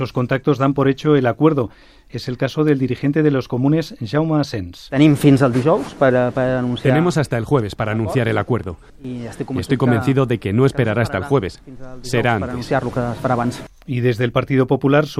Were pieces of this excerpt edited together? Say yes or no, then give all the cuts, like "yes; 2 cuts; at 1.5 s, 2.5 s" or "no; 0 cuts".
no; 0 cuts